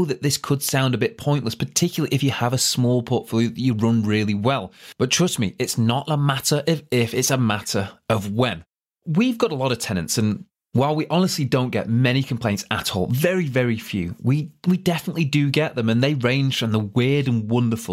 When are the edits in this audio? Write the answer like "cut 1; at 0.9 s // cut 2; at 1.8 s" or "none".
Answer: none